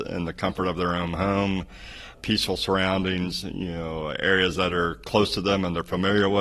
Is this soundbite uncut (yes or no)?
no